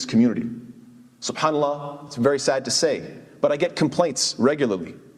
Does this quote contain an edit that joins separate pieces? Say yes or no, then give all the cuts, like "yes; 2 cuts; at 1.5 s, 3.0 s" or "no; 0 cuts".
no; 0 cuts